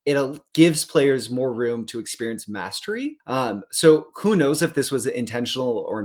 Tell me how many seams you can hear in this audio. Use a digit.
0